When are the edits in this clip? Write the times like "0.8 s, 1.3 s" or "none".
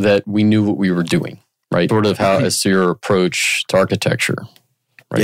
1.9 s